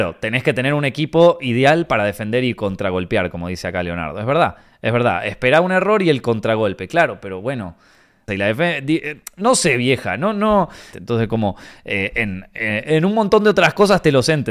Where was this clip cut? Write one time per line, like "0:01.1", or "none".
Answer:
0:08.3
0:10.9